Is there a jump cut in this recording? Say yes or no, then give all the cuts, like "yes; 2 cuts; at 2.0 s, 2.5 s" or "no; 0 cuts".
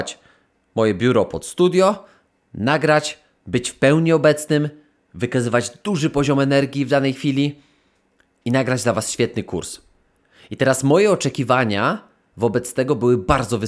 no; 0 cuts